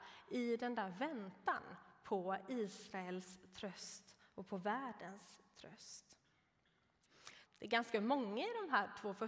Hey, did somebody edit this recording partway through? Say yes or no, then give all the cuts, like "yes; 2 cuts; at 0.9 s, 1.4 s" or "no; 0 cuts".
yes; 1 cut; at 7.5 s